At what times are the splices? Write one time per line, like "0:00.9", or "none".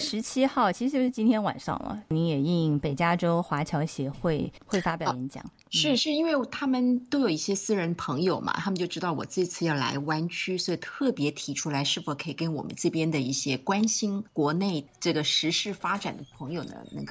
none